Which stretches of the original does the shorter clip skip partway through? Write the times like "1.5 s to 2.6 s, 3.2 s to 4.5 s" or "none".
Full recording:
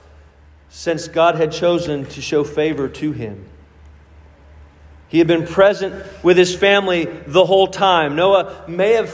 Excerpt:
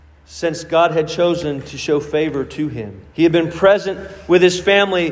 3.5 s to 5.0 s